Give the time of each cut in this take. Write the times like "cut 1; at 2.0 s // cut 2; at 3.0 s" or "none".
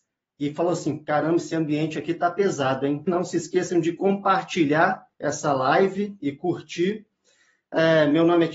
cut 1; at 3.1 s // cut 2; at 5.1 s